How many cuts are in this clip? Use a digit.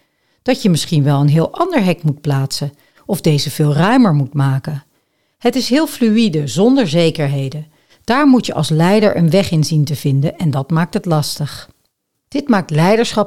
0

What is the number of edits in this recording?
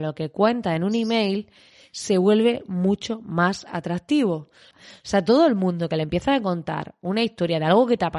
1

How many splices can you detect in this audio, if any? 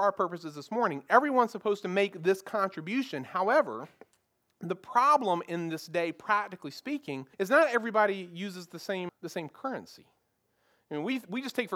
2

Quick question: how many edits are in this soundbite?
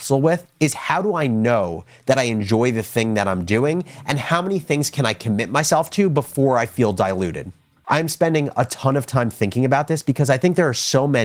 1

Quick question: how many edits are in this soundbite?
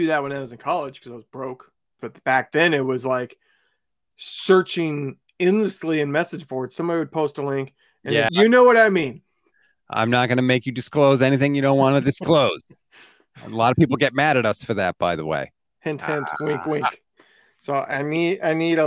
3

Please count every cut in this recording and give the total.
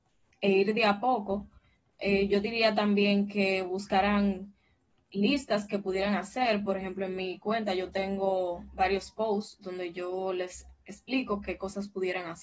0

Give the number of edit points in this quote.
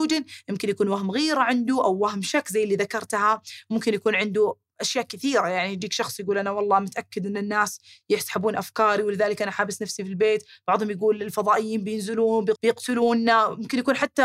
1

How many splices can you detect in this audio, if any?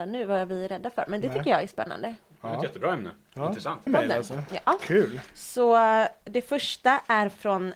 1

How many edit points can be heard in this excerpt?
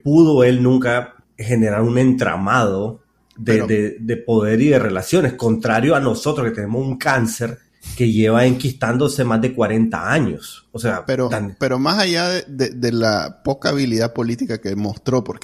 0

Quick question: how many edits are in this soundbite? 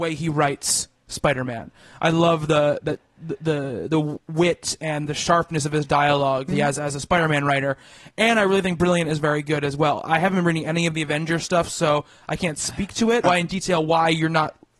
2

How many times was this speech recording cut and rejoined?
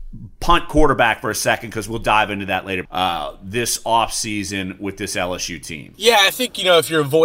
1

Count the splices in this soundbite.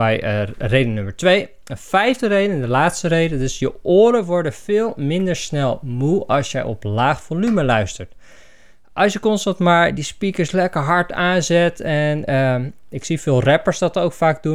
0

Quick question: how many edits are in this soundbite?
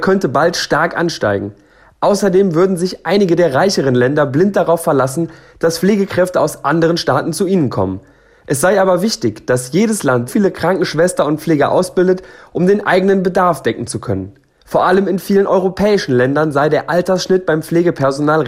2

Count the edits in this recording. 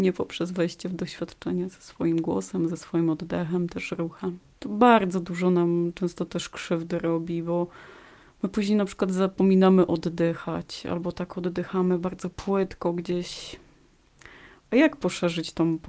1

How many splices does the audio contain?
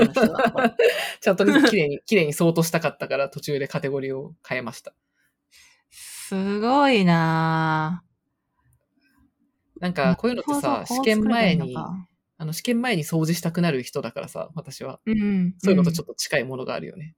0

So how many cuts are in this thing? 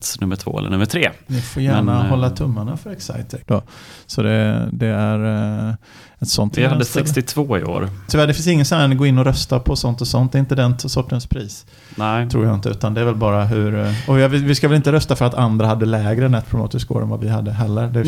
3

